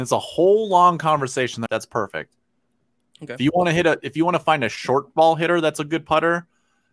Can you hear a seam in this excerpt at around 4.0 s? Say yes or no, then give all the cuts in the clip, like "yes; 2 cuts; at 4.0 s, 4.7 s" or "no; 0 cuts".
no; 1 cut; at 1.7 s